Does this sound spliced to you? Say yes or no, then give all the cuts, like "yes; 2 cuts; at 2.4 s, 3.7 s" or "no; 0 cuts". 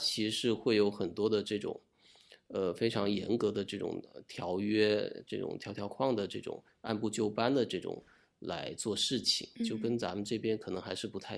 yes; 1 cut; at 5.9 s